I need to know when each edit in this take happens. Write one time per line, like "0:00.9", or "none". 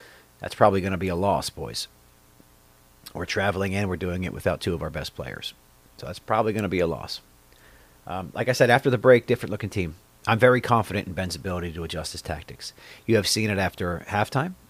none